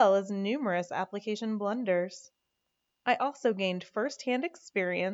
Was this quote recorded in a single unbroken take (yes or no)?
yes